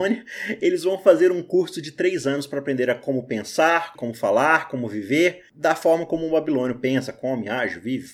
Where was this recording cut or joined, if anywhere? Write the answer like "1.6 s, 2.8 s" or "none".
4.0 s